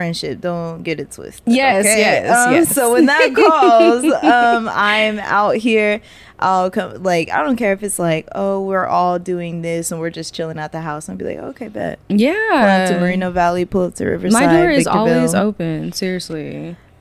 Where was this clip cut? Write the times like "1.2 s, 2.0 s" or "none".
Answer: none